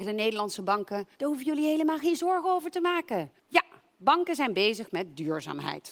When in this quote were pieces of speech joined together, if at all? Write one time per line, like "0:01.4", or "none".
0:01.2
0:03.4